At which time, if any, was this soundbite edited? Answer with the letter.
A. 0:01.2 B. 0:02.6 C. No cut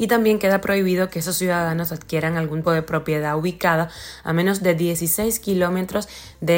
B